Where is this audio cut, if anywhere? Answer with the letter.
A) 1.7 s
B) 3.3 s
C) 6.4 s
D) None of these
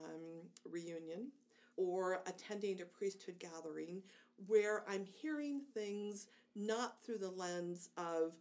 A